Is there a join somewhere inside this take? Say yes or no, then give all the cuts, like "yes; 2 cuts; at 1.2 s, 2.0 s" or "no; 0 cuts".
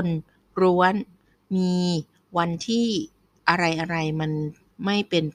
no; 0 cuts